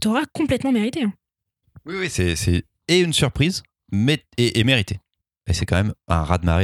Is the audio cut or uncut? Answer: uncut